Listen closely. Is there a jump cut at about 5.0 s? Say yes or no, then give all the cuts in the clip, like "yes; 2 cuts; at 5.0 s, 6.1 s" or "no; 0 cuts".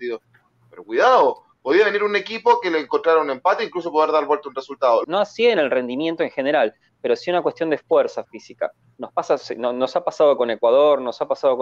yes; 1 cut; at 5.0 s